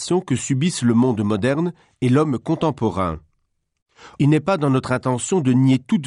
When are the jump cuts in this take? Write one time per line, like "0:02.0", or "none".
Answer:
0:04.2